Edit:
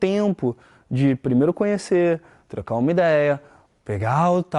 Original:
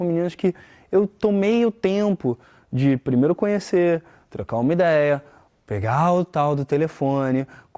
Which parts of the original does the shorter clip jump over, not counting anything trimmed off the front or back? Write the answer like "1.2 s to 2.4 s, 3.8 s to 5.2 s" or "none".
none